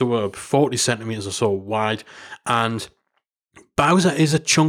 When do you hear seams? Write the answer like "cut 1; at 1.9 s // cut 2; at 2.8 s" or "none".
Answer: none